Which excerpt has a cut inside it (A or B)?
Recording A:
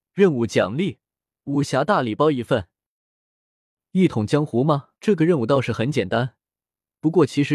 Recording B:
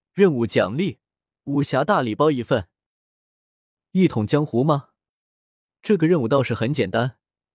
A